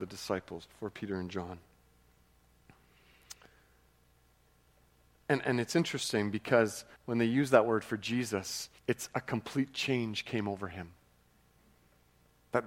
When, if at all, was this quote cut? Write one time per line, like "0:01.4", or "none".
0:08.8